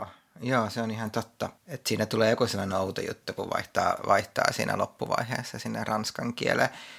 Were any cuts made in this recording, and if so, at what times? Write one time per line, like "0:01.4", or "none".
0:01.6

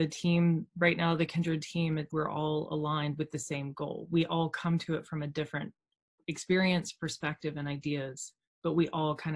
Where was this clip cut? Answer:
0:02.1

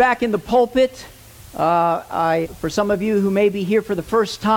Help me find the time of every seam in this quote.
0:02.4

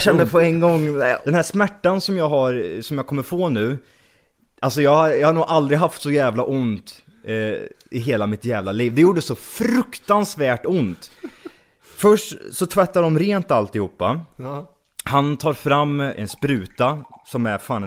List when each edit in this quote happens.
none

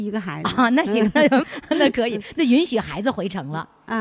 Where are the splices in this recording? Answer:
0:01.4

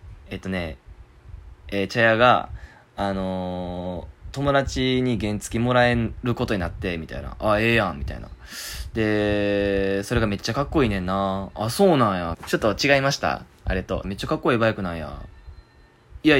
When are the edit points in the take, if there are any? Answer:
0:12.3
0:14.0

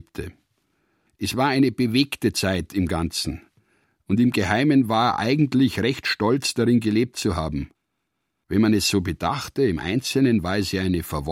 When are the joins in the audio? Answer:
none

